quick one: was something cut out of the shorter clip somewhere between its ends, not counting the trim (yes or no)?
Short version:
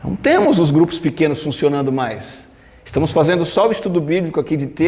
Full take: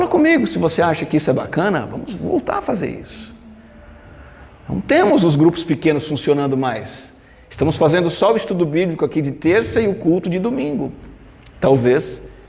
no